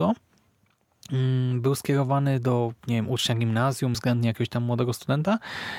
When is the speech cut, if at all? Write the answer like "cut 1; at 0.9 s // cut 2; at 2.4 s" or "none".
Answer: cut 1; at 3.9 s